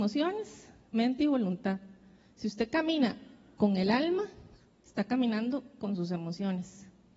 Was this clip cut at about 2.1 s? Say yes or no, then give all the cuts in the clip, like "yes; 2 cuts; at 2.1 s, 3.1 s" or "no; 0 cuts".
no; 0 cuts